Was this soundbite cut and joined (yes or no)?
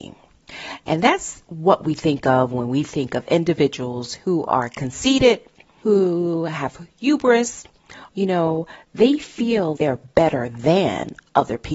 yes